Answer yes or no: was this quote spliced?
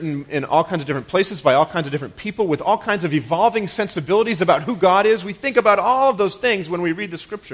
no